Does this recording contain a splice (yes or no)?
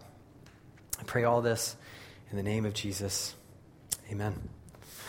no